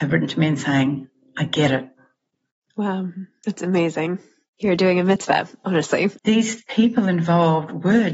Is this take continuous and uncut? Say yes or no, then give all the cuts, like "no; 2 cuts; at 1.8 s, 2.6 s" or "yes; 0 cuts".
no; 1 cut; at 6.2 s